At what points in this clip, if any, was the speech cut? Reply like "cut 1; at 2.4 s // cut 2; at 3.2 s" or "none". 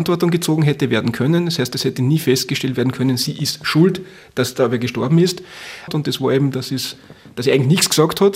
cut 1; at 5.9 s

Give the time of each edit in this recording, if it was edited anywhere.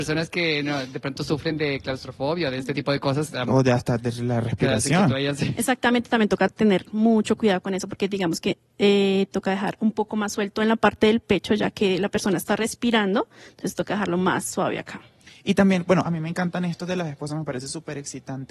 none

